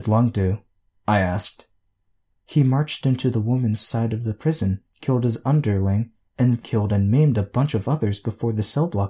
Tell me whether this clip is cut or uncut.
cut